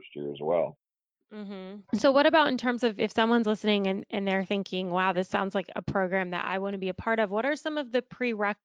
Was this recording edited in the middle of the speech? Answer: yes; 1 cut; at 1.8 s

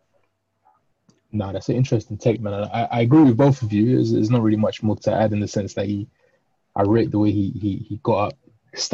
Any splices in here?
yes; 1 cut; at 5.0 s

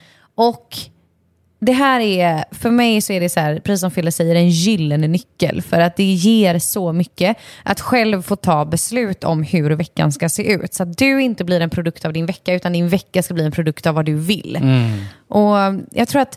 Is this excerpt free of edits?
yes; 0 cuts

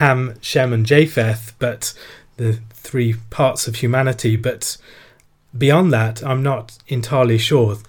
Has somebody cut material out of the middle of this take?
no; 0 cuts

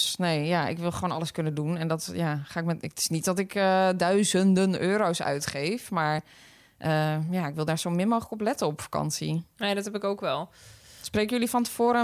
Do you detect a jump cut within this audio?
no; 0 cuts

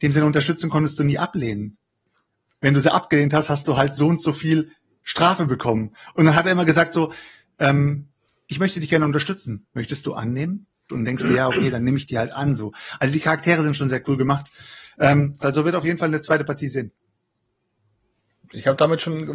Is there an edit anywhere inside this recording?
yes; 2 cuts; at 10.9 s, 15.4 s

